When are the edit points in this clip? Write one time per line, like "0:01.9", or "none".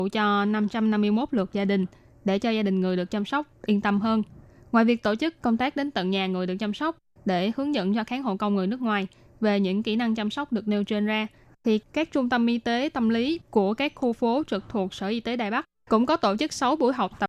none

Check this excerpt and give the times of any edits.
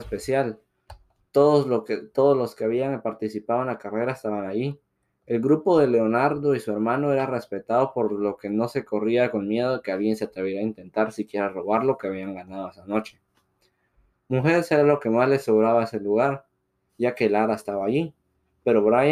0:16.9

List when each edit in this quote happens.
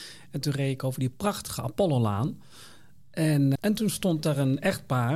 0:03.6

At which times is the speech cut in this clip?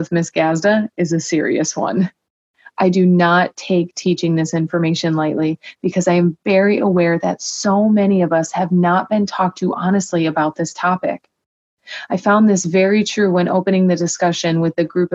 none

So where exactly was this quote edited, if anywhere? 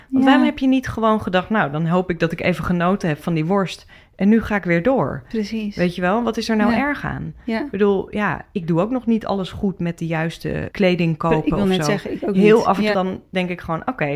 0:10.7
0:12.9

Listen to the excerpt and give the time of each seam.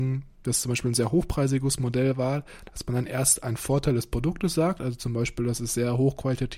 none

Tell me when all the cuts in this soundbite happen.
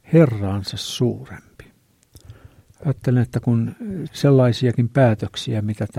0:04.1

